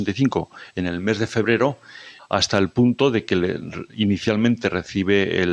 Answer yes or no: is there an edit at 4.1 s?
no